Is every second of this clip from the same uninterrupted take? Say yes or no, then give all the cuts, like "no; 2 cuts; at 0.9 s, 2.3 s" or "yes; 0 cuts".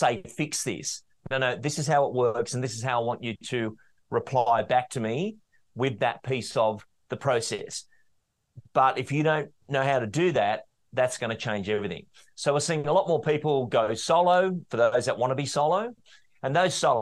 yes; 0 cuts